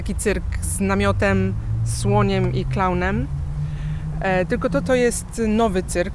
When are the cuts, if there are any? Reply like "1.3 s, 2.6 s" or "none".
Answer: 4.8 s